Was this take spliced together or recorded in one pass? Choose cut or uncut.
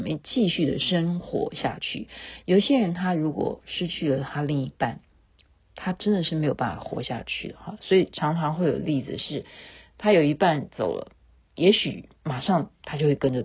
uncut